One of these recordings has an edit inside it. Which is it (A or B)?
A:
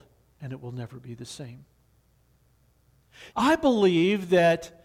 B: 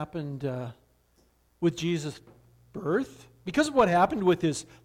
A